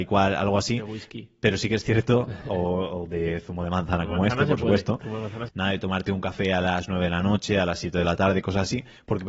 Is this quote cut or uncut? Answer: cut